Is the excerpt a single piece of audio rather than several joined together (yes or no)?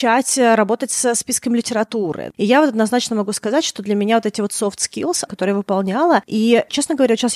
no